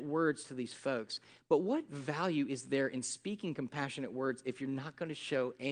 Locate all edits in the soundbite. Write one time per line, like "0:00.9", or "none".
none